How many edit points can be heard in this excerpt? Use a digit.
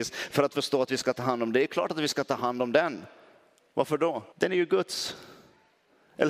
1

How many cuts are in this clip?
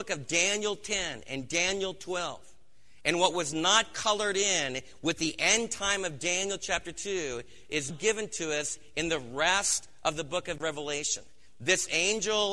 1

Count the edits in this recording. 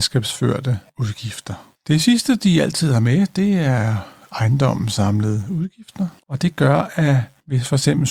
1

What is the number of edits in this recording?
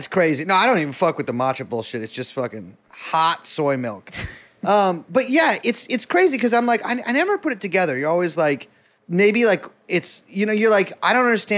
1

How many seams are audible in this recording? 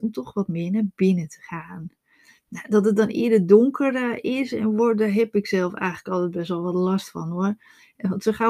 0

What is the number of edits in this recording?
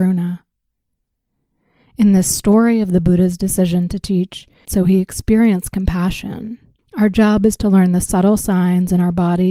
2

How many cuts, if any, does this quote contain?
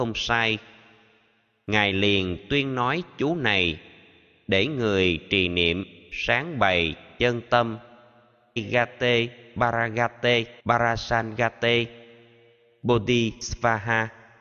2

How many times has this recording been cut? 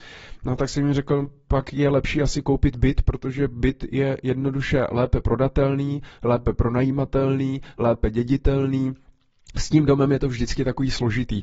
1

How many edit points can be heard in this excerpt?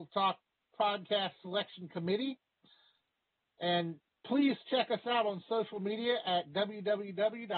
0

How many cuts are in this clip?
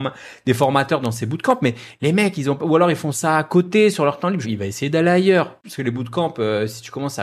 2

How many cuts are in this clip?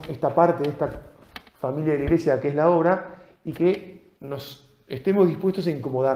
1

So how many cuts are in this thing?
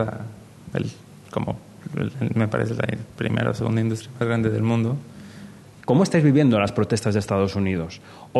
1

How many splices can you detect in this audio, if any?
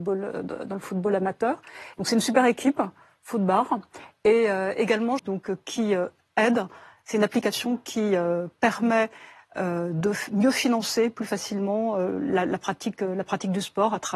2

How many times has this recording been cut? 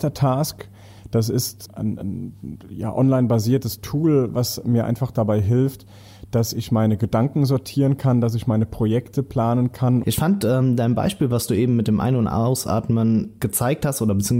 1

